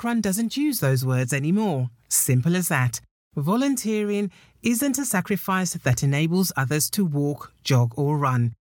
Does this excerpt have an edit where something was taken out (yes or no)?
no